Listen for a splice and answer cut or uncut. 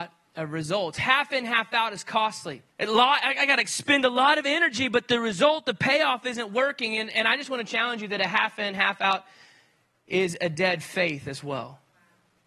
cut